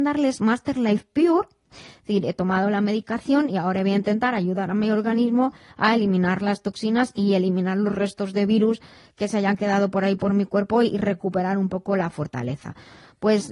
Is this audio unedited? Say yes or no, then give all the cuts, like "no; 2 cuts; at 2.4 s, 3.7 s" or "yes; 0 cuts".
no; 1 cut; at 1.7 s